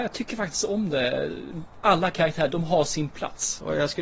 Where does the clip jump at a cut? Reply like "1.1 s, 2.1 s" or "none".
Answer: 2.5 s